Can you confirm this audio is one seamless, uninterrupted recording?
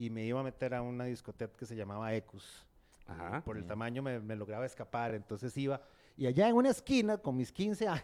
yes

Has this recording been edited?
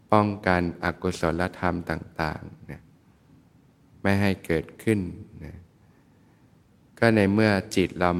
no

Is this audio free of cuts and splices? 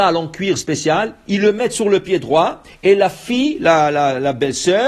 yes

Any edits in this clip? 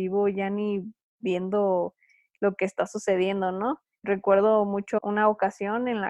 no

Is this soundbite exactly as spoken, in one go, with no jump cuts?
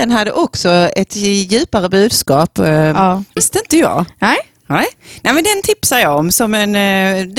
no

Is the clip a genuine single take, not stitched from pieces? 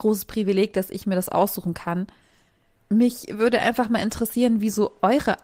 yes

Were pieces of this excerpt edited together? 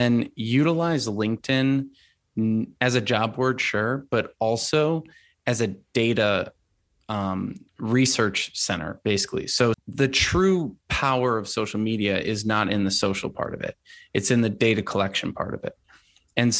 yes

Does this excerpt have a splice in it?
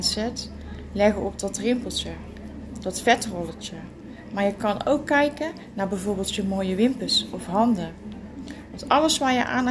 no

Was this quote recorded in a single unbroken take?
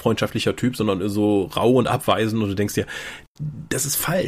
yes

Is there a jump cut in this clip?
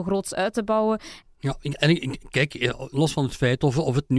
yes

